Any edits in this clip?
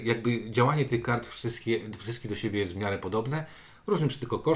no; 0 cuts

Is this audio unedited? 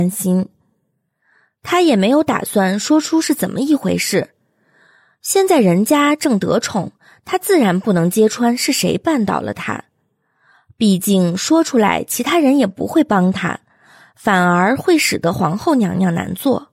yes; 0 cuts

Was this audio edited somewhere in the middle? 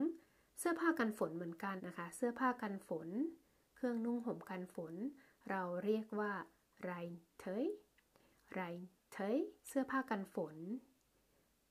yes; 2 cuts; at 1.8 s, 9.6 s

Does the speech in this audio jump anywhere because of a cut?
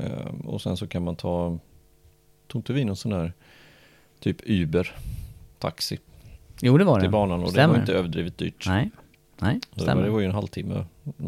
no; 0 cuts

